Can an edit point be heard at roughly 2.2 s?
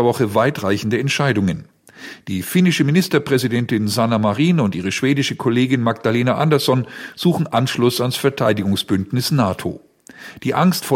no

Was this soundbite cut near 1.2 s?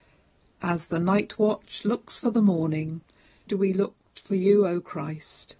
no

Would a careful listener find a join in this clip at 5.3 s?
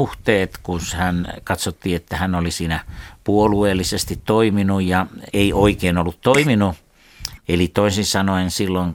yes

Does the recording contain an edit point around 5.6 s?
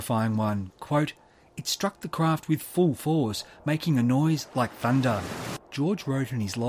yes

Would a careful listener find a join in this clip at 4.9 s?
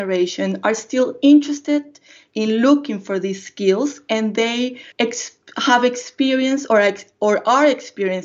yes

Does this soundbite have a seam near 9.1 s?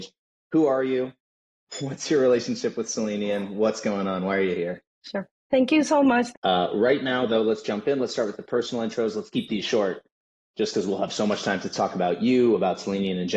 no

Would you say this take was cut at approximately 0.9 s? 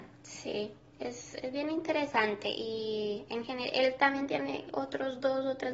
no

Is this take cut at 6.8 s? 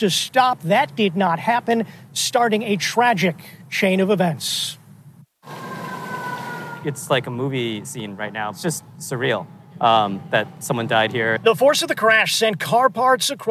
no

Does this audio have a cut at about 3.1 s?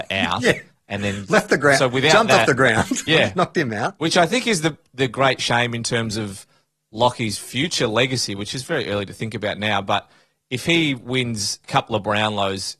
yes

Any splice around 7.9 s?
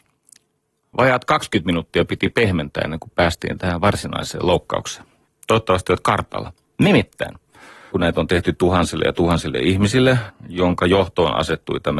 yes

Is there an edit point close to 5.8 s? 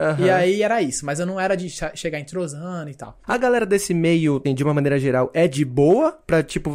no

